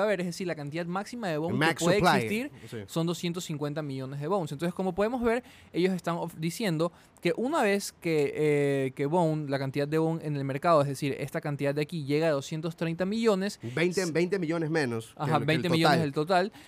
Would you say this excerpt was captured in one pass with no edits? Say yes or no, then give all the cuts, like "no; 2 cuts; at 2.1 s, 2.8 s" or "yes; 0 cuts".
yes; 0 cuts